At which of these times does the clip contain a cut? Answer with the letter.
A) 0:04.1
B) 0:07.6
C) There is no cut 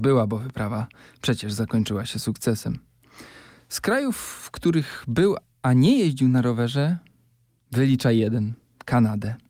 C